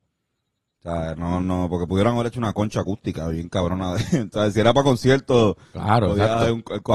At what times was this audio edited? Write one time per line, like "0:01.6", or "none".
none